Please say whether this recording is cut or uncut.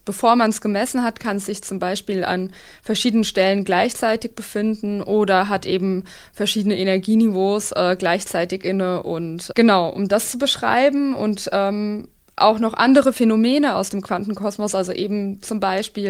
uncut